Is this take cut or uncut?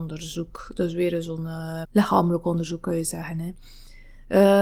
cut